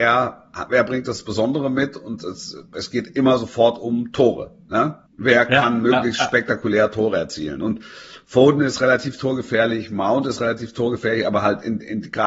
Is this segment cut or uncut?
cut